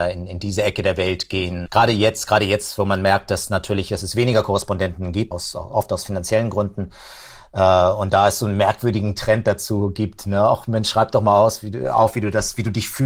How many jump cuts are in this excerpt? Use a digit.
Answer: 2